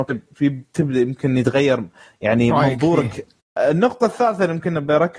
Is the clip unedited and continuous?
no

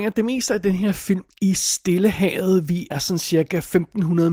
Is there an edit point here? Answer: yes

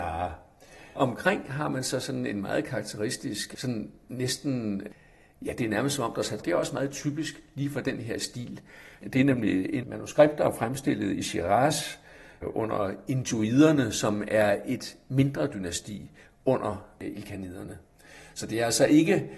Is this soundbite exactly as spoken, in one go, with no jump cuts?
no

